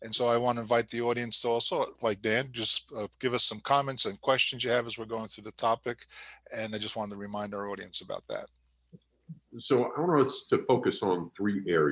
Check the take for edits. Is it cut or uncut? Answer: uncut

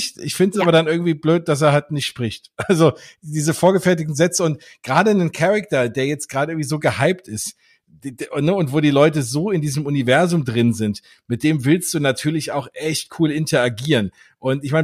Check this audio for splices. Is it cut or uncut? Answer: uncut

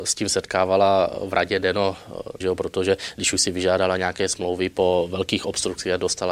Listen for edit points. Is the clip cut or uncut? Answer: cut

